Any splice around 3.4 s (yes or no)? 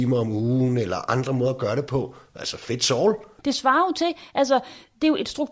yes